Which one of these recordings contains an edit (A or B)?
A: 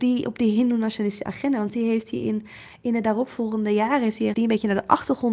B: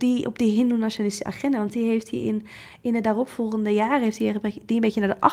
A